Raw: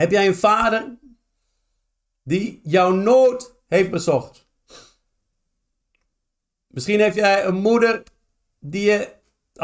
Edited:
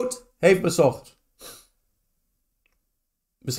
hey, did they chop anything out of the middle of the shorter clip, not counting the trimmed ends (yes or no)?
no